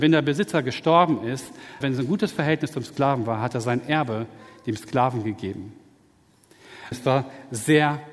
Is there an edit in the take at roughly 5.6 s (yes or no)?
no